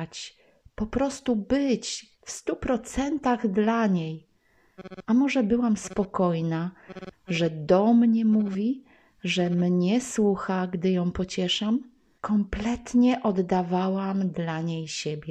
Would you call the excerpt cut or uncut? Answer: cut